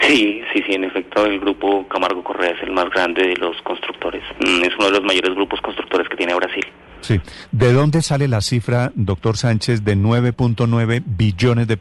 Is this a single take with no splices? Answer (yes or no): yes